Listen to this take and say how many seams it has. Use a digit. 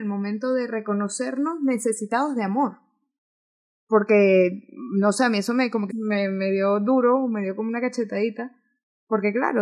1